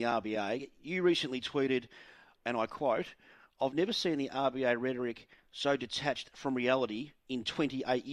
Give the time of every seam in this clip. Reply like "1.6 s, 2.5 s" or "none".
none